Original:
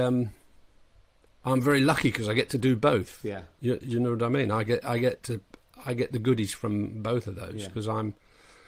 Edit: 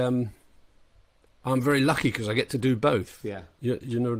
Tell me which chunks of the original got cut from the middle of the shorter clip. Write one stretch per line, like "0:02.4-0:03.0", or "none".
none